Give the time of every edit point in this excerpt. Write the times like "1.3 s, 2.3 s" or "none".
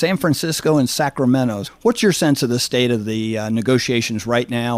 1.6 s